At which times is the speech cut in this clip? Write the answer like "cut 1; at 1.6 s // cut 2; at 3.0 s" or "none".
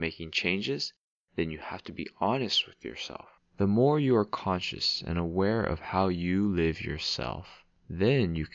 cut 1; at 3.4 s

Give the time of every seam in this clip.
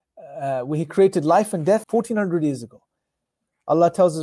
cut 1; at 1.8 s

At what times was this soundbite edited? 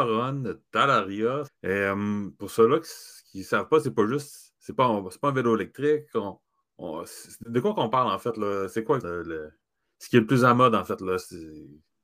cut 1; at 1.5 s // cut 2; at 9.0 s

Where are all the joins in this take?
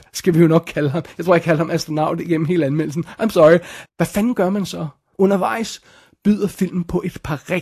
cut 1; at 3.9 s // cut 2; at 5.1 s

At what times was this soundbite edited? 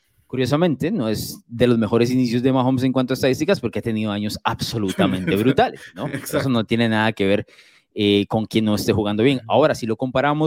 none

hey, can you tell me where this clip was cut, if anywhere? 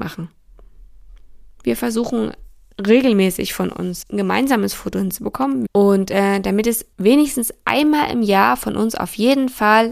cut 1; at 4.0 s // cut 2; at 5.7 s // cut 3; at 6.9 s

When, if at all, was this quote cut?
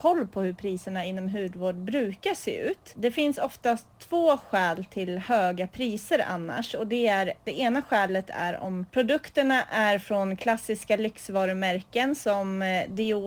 none

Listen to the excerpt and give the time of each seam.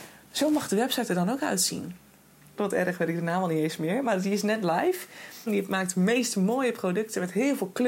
cut 1; at 2.6 s // cut 2; at 5.5 s

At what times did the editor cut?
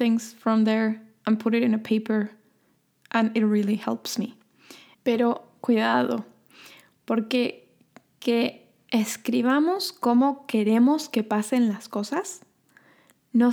cut 1; at 4.9 s

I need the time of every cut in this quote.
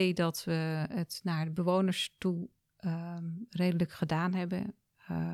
none

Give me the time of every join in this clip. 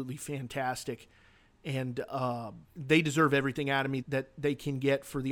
cut 1; at 2.6 s // cut 2; at 4.0 s

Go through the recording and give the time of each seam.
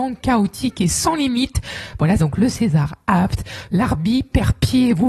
cut 1; at 2.2 s // cut 2; at 3.7 s

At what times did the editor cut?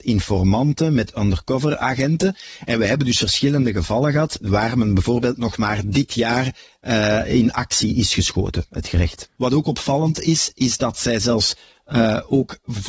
cut 1; at 9.4 s

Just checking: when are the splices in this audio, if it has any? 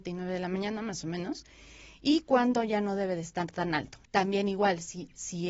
cut 1; at 4.0 s

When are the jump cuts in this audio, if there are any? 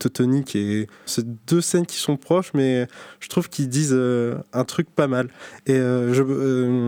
cut 1; at 1.1 s

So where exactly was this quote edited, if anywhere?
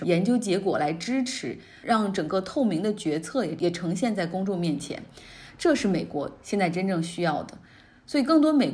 none

